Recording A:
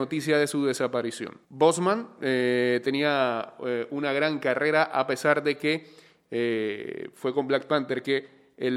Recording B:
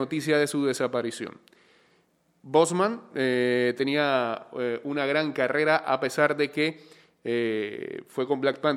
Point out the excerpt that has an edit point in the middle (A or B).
A